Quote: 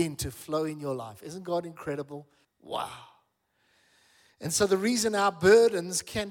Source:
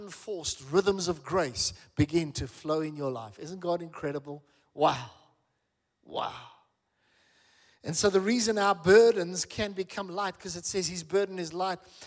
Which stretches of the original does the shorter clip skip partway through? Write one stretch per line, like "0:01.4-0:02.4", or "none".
0:04.6-0:05.9